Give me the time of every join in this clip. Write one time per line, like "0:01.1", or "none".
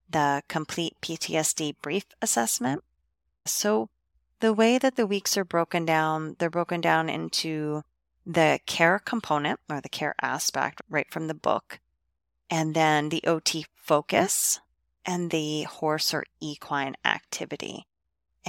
0:03.5
0:15.3